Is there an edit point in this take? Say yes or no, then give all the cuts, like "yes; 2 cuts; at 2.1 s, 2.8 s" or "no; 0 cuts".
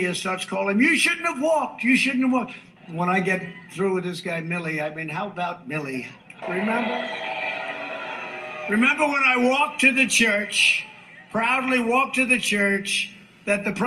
yes; 2 cuts; at 2.8 s, 6.4 s